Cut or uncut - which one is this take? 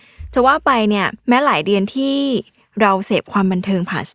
cut